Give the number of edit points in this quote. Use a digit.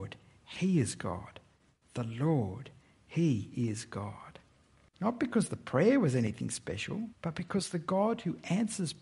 2